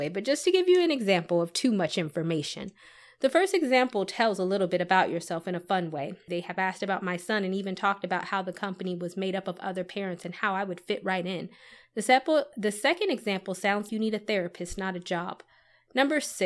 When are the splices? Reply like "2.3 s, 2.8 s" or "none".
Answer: 6.3 s, 13.9 s